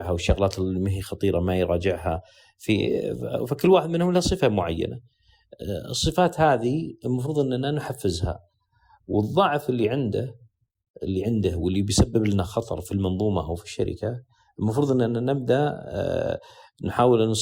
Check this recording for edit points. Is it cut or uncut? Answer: cut